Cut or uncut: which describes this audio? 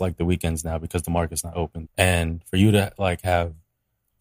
cut